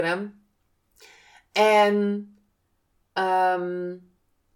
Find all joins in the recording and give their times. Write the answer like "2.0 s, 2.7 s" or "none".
3.2 s